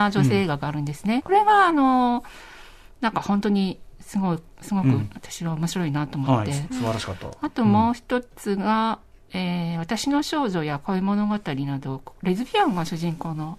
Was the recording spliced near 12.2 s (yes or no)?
no